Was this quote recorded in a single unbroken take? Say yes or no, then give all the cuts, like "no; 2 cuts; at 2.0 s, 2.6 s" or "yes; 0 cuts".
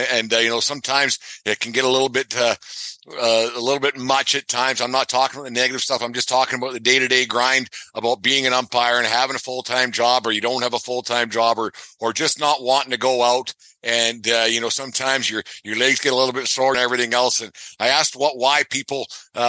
no; 1 cut; at 16.7 s